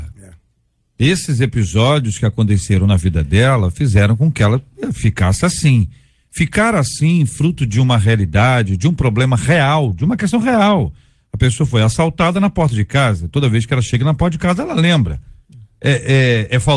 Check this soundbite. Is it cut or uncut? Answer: uncut